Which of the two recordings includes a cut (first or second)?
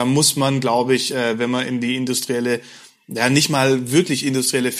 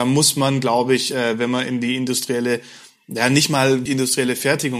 second